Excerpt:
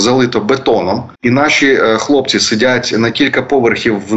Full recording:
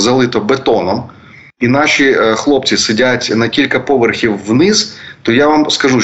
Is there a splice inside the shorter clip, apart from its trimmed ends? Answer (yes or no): yes